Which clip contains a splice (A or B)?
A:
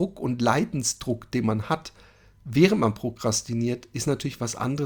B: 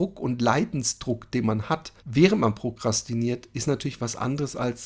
B